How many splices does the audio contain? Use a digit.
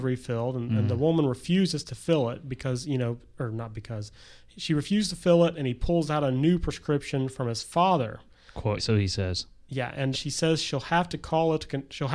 2